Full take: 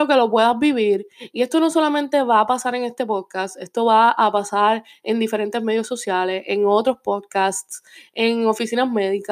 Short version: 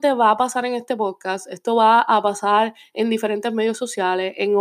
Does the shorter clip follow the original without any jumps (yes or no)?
yes